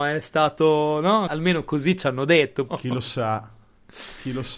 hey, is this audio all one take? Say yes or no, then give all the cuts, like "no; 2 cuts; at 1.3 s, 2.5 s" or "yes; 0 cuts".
no; 2 cuts; at 1.3 s, 2.7 s